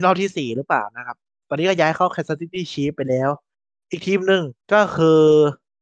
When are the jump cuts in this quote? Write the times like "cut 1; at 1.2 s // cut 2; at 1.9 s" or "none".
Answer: cut 1; at 4.6 s